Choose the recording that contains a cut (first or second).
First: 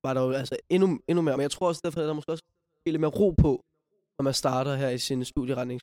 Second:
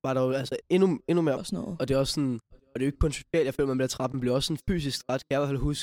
second